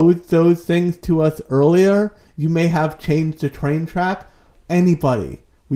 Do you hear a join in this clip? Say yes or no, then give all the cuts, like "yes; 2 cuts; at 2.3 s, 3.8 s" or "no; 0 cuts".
yes; 1 cut; at 4.5 s